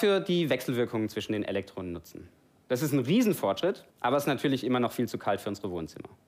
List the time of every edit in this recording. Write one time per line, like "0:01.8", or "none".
0:02.6
0:03.9